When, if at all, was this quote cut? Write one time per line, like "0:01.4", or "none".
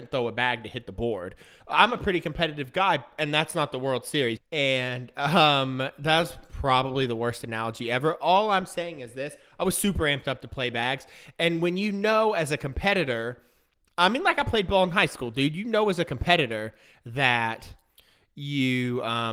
0:04.4